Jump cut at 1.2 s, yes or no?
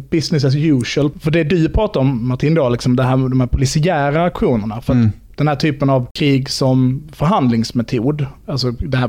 no